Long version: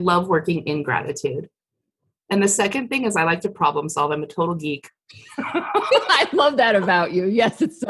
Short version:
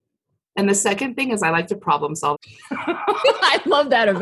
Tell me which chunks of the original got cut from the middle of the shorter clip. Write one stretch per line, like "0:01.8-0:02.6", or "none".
0:04.1-0:05.0